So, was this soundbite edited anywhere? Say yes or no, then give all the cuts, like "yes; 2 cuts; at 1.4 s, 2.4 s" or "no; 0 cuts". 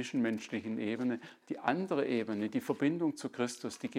no; 0 cuts